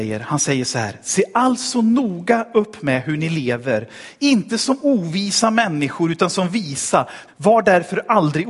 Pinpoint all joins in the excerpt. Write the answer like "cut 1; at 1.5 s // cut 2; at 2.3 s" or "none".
cut 1; at 7.3 s